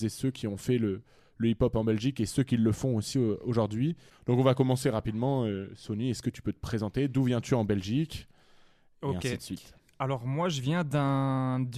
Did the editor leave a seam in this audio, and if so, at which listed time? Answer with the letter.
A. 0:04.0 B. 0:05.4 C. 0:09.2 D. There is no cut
D